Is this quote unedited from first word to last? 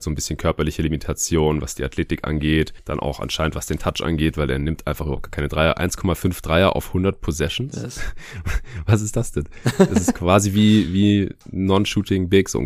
yes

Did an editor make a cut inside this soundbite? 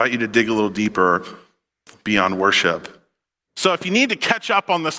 no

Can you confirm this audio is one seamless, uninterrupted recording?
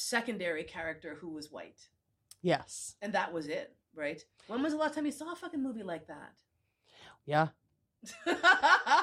no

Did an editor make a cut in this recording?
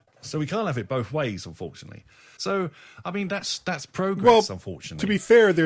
yes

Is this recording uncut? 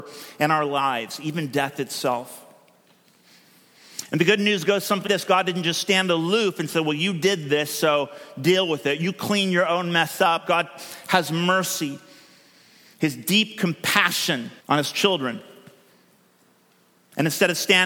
no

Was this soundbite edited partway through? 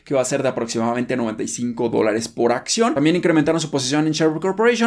no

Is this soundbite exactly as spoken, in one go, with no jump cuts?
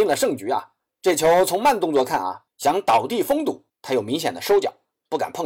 no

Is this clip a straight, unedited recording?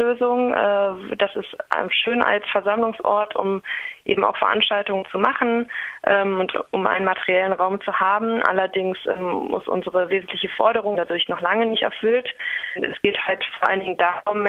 no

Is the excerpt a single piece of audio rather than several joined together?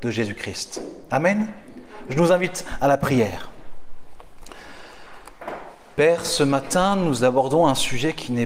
yes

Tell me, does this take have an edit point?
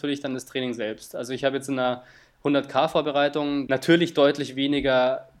yes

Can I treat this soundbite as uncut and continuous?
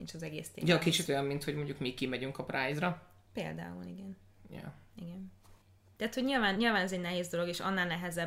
yes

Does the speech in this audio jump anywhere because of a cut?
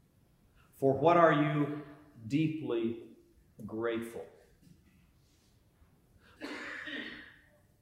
yes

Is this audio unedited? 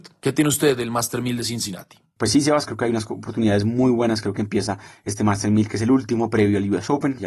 no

